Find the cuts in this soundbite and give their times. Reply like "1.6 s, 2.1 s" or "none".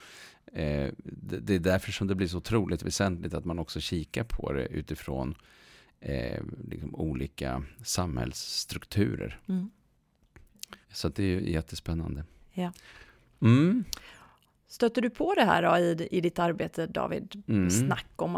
10.8 s